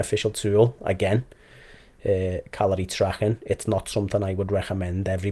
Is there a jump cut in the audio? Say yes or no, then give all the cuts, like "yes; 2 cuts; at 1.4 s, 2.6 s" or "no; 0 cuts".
no; 0 cuts